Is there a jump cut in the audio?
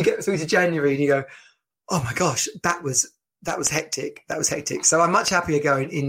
no; 0 cuts

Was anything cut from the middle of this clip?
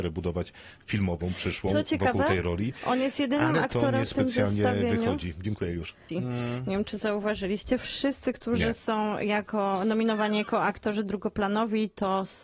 yes; 1 cut; at 6.1 s

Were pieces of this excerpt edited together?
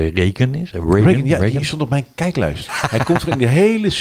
yes; 1 cut; at 2.7 s

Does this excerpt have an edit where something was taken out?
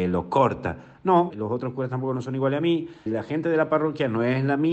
yes; 2 cuts; at 1.3 s, 3.1 s

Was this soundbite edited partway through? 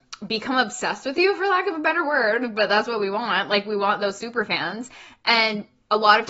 no; 0 cuts

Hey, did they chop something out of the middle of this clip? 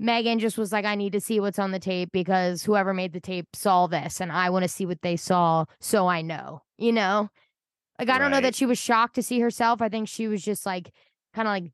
no; 0 cuts

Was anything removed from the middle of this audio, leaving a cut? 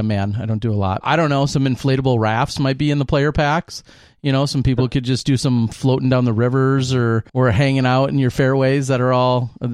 yes; 2 cuts; at 1.0 s, 7.3 s

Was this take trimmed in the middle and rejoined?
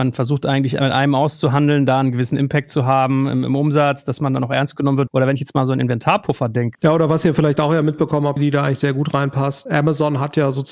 yes; 3 cuts; at 5.1 s, 6.8 s, 8.4 s

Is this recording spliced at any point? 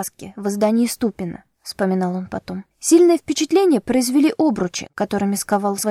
yes; 1 cut; at 2.7 s

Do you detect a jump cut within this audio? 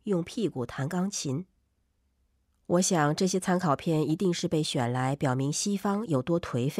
no; 0 cuts

